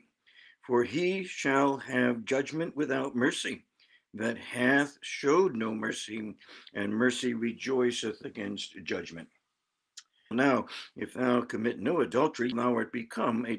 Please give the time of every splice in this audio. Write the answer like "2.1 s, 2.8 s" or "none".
10.3 s, 12.5 s